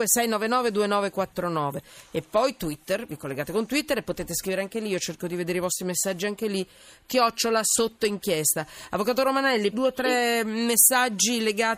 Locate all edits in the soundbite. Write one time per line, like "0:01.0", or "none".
0:09.7